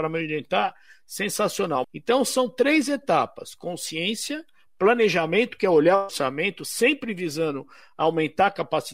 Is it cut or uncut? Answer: cut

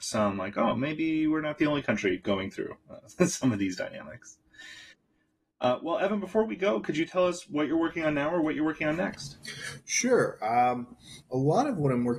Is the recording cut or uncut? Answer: uncut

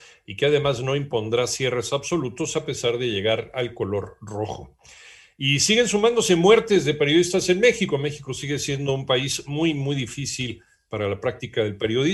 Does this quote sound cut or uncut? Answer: uncut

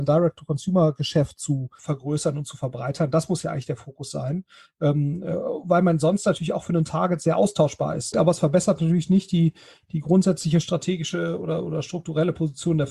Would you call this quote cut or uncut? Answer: cut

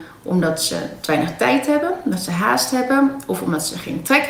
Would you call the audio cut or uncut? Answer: uncut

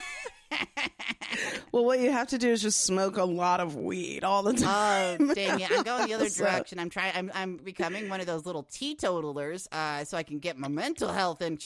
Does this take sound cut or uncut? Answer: uncut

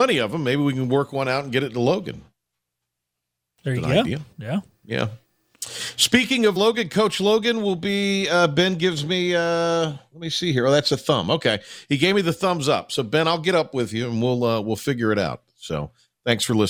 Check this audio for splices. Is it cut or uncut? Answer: cut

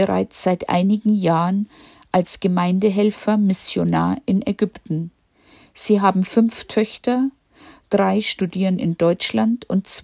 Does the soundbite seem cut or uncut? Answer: uncut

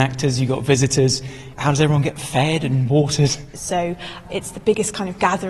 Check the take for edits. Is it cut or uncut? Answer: cut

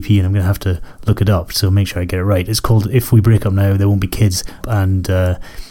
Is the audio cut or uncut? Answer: cut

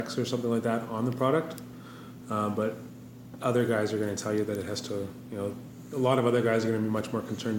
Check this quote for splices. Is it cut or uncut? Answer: uncut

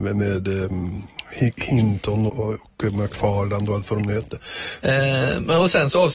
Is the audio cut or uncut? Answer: cut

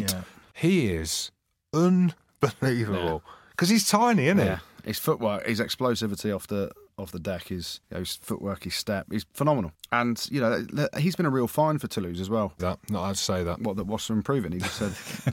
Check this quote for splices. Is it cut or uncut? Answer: cut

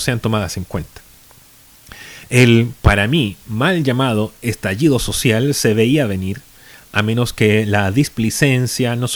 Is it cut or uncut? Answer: uncut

